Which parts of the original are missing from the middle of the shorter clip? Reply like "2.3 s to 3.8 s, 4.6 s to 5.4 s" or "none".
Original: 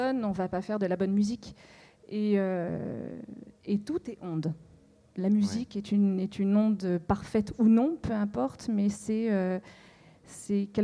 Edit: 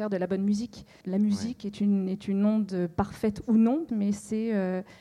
1.7 s to 5.1 s, 8.0 s to 8.7 s